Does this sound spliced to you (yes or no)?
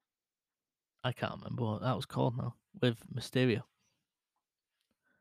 no